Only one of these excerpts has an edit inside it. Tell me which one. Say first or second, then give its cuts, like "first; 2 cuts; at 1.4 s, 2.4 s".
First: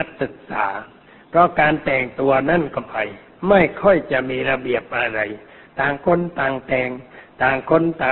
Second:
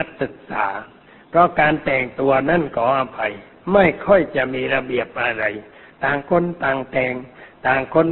first; 1 cut; at 2.8 s